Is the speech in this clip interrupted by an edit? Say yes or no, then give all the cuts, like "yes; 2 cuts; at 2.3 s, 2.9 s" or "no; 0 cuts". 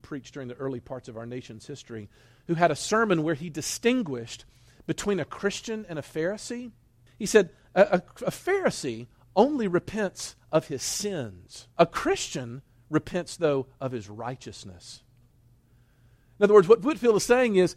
yes; 2 cuts; at 7.1 s, 11.7 s